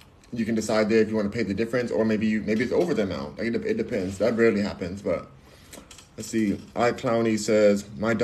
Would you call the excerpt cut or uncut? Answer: uncut